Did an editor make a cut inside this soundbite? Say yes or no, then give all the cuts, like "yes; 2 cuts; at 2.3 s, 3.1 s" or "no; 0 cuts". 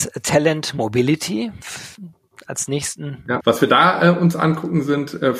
yes; 1 cut; at 3.4 s